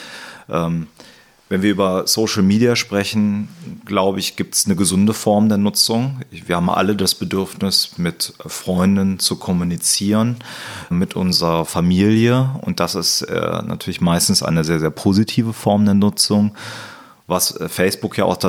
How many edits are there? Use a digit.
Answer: 1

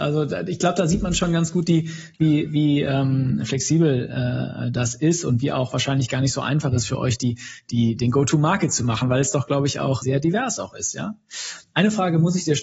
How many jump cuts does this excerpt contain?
2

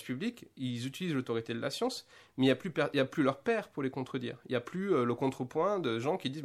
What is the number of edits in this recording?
0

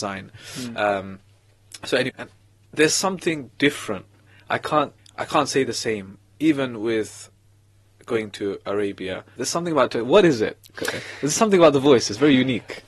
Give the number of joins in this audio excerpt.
3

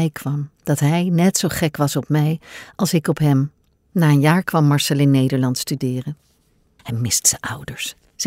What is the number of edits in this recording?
2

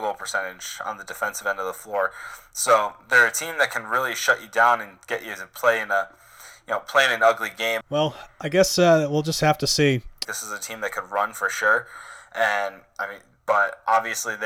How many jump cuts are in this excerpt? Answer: 2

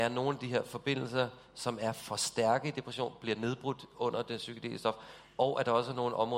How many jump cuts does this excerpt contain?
0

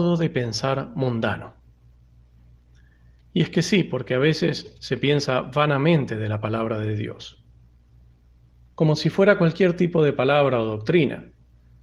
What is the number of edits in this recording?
0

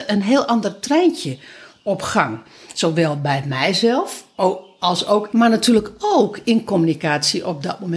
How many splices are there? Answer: 1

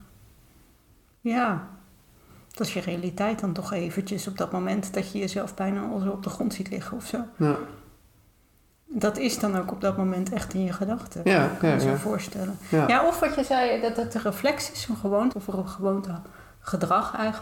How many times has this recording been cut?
1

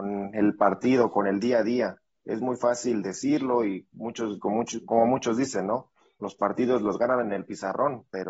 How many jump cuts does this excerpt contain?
0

